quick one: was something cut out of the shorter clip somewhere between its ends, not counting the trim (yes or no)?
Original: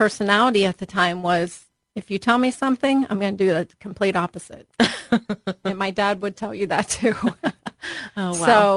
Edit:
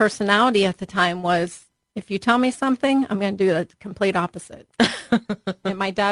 no